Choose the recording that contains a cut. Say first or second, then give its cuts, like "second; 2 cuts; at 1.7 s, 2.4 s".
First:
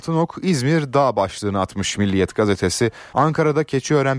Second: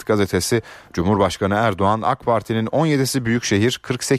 first; 1 cut; at 3.1 s